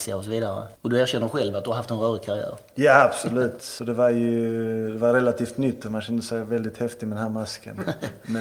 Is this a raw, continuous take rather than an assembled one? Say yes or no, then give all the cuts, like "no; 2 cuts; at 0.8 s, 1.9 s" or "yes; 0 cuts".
no; 1 cut; at 3.6 s